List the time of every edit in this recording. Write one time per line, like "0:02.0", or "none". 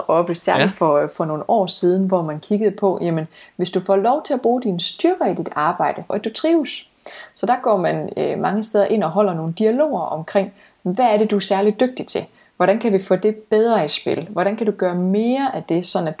0:06.1